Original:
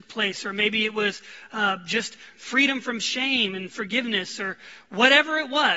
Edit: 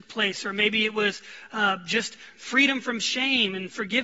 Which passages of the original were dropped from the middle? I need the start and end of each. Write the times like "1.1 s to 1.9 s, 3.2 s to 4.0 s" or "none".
none